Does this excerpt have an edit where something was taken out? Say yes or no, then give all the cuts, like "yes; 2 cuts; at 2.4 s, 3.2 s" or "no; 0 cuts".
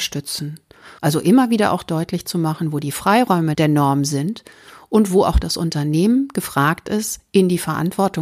yes; 1 cut; at 1.0 s